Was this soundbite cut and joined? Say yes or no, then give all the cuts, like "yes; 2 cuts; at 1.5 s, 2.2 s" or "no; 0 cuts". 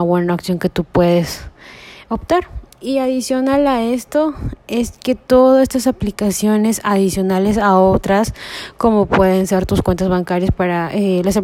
no; 0 cuts